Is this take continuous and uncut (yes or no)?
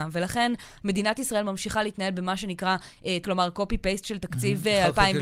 no